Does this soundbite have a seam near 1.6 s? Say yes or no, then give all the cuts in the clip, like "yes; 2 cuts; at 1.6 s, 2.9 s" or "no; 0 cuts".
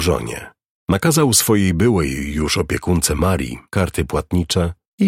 no; 1 cut; at 3.7 s